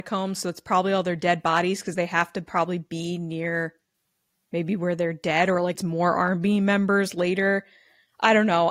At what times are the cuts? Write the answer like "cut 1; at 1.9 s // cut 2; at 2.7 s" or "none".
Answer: cut 1; at 5.7 s

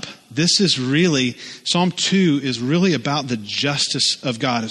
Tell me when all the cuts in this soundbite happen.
none

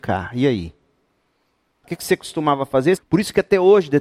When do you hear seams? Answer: cut 1; at 1.8 s // cut 2; at 3.0 s

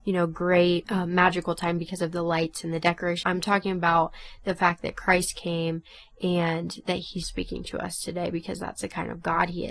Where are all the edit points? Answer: cut 1; at 3.2 s // cut 2; at 7.2 s

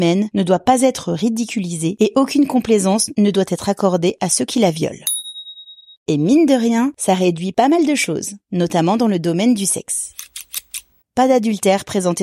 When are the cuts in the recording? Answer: none

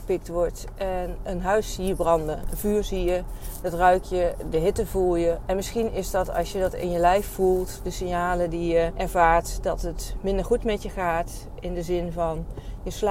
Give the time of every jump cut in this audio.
none

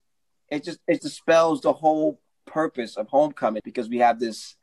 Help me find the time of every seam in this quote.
cut 1; at 1.0 s // cut 2; at 3.6 s

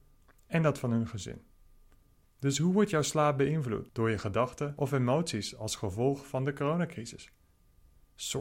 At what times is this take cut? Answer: cut 1; at 2.2 s

